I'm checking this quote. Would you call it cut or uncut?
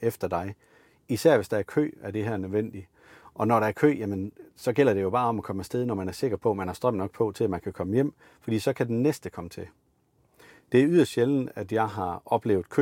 uncut